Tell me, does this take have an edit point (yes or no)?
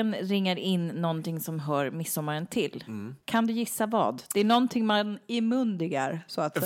yes